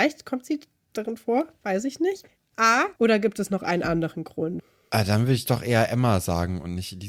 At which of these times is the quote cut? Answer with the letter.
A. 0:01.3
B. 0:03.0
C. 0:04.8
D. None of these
B